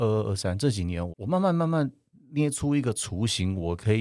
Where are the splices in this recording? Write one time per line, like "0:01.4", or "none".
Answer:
0:01.1